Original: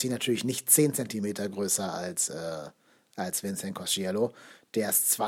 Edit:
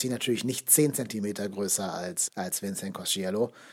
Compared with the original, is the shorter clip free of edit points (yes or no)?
no